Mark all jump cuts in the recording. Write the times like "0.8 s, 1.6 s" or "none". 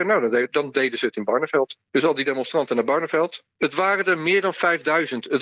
1.8 s, 3.5 s